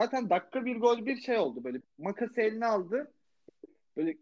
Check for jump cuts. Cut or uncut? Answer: cut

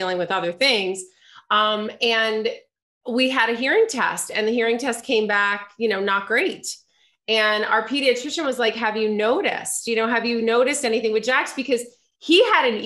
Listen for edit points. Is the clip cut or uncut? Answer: uncut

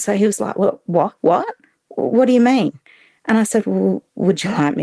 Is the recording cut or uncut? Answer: cut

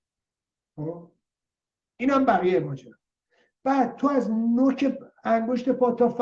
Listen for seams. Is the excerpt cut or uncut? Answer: uncut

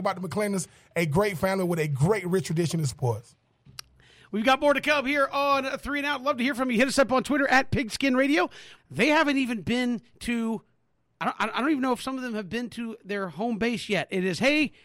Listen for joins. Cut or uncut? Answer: cut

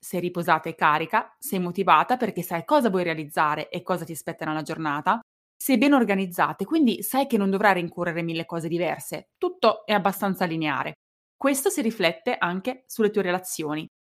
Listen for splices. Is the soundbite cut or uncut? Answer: cut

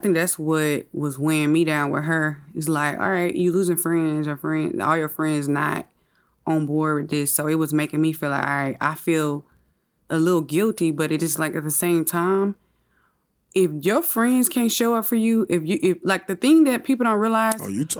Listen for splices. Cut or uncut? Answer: uncut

